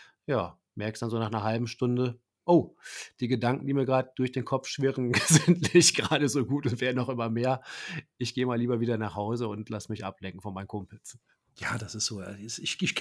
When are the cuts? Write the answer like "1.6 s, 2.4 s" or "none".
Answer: none